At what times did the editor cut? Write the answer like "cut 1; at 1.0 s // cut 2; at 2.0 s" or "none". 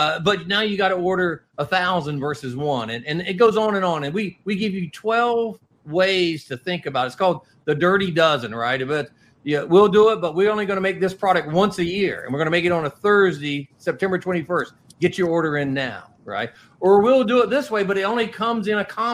none